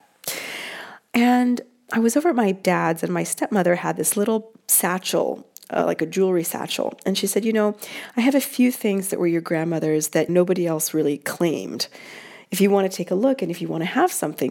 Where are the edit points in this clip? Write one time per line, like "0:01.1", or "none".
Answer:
none

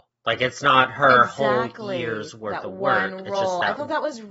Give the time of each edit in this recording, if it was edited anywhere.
none

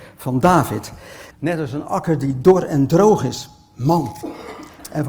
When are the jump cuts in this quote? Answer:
0:01.3

